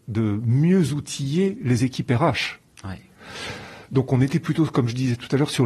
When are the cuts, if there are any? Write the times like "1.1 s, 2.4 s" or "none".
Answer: none